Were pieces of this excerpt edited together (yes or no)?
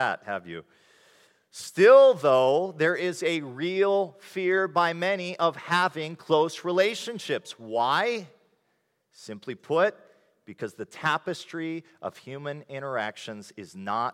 no